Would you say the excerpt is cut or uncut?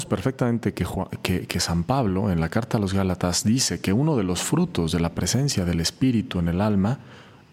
uncut